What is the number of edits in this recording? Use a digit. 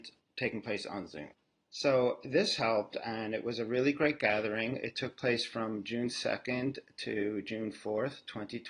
1